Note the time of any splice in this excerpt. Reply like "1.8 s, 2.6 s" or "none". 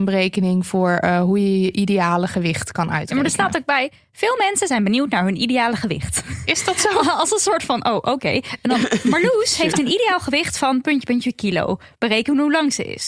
none